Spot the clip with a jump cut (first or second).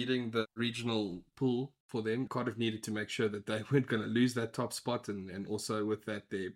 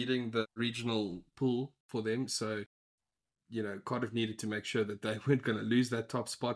first